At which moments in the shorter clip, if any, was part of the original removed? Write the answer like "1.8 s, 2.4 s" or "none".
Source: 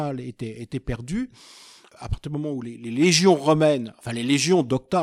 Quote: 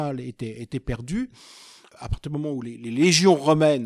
none